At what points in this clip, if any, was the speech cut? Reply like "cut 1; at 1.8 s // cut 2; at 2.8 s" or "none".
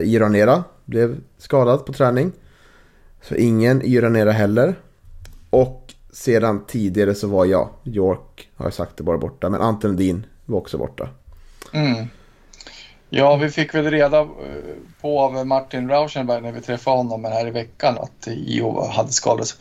cut 1; at 17.9 s